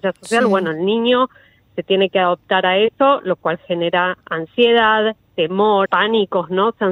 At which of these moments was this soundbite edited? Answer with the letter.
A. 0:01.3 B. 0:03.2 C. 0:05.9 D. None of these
C